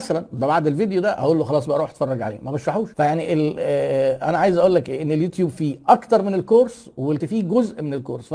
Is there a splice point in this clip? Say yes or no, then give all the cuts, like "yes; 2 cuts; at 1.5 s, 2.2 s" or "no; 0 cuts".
yes; 1 cut; at 2.9 s